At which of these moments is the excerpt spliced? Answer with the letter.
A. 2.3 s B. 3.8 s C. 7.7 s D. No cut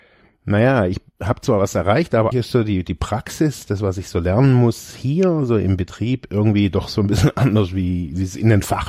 A